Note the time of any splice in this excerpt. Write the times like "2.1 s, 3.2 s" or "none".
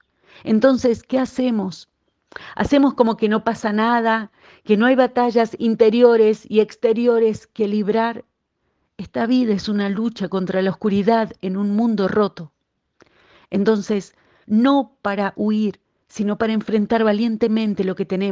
14.4 s